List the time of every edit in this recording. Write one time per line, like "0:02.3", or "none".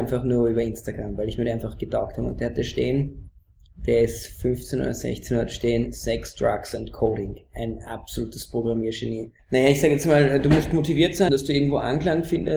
0:09.4
0:11.3

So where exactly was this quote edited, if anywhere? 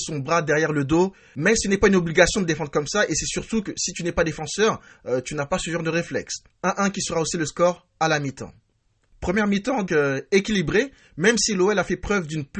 0:06.5
0:09.9

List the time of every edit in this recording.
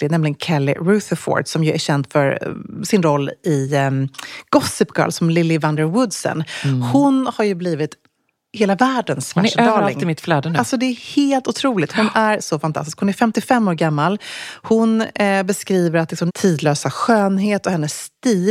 0:16.3

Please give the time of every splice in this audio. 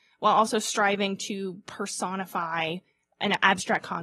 none

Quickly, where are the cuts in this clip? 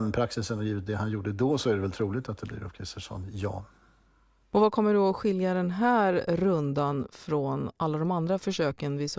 none

